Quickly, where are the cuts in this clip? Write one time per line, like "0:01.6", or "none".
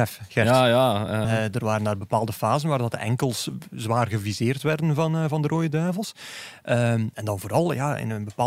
0:01.2